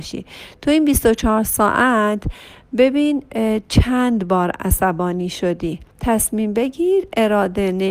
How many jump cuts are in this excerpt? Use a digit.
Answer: 1